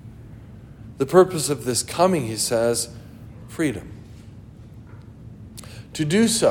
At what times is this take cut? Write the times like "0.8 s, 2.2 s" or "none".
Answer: 3.5 s